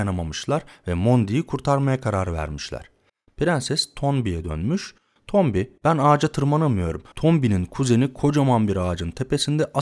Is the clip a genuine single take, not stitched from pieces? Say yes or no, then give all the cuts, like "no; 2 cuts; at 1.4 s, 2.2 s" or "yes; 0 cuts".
no; 2 cuts; at 5.8 s, 7.1 s